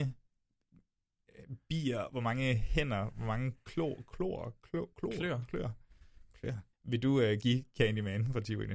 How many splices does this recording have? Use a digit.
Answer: 1